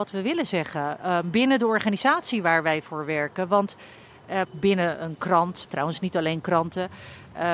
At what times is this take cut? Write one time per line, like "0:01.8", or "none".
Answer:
0:04.4
0:05.7